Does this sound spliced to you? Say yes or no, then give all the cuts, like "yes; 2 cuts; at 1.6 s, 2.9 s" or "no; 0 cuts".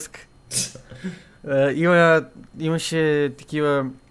no; 0 cuts